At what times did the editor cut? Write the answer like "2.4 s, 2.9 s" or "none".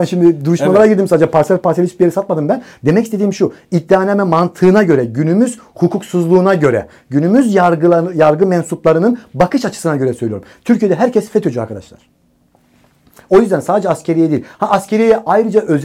none